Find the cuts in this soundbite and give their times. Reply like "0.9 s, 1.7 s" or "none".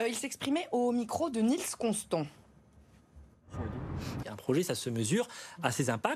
4.2 s